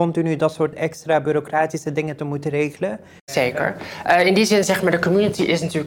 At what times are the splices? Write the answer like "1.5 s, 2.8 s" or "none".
none